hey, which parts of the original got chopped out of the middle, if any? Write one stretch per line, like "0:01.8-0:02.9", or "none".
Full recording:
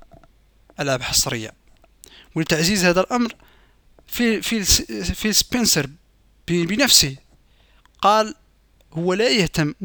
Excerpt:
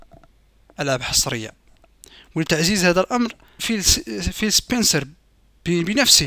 0:03.6-0:04.4